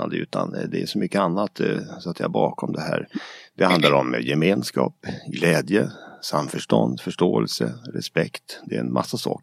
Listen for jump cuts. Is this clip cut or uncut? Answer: uncut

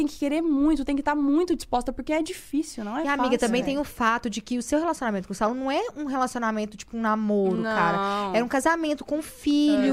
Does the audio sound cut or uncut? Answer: uncut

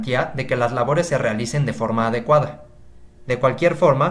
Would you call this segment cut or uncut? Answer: cut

